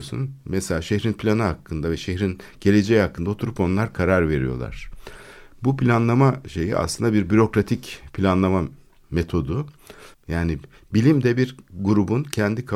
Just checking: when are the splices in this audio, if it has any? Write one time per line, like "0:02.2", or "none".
0:10.1